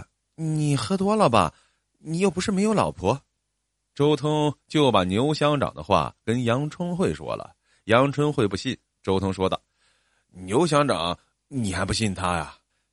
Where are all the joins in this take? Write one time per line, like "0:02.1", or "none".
none